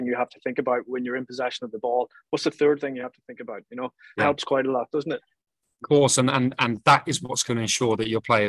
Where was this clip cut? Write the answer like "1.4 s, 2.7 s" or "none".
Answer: 4.2 s